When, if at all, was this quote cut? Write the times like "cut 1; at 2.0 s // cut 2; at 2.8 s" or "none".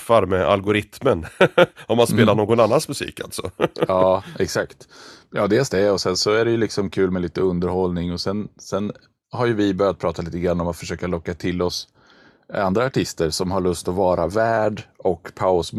none